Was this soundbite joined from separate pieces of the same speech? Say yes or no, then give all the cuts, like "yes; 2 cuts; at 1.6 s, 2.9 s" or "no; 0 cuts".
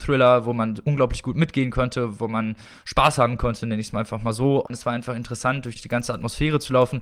yes; 2 cuts; at 4.7 s, 5.8 s